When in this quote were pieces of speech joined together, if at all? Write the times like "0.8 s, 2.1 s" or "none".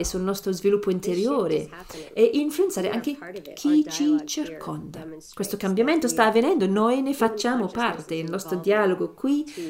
none